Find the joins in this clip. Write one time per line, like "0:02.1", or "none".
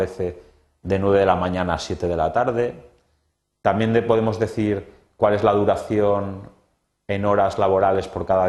none